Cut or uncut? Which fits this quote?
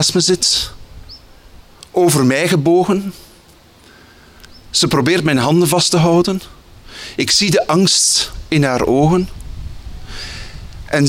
uncut